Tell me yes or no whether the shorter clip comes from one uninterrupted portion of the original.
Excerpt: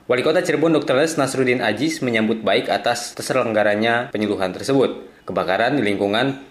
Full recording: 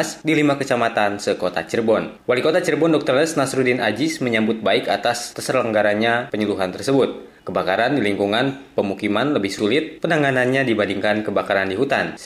yes